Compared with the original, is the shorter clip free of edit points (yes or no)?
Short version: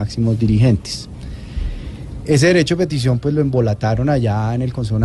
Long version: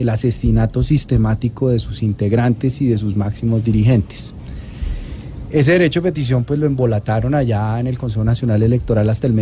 yes